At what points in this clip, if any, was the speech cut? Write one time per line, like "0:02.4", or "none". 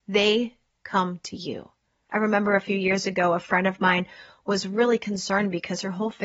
none

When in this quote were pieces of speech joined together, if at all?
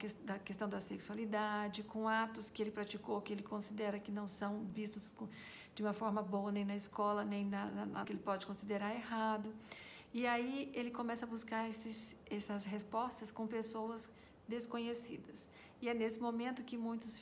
0:08.0

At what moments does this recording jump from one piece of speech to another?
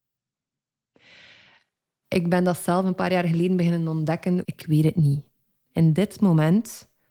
0:04.4

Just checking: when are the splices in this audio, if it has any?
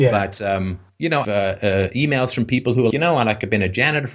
0:01.2
0:02.9

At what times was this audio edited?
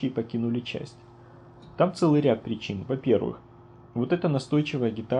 none

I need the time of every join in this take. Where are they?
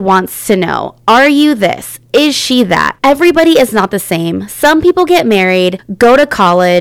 0:03.0

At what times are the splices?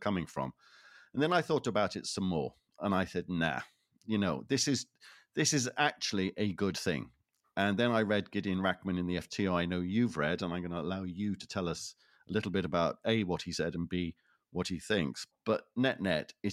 0:15.3

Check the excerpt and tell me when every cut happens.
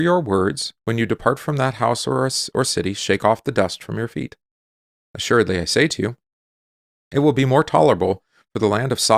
none

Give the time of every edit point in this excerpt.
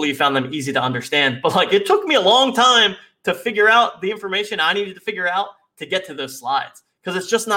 none

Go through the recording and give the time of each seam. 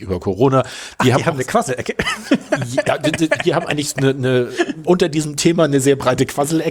0:04.8

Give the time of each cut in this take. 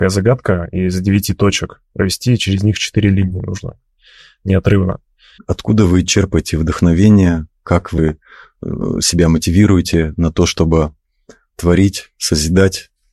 0:05.4

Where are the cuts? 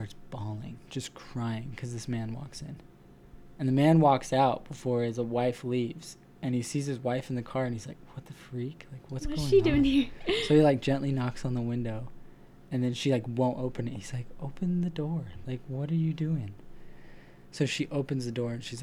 none

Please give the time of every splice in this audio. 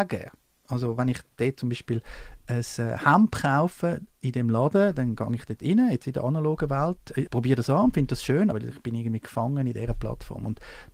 0:07.3
0:08.5

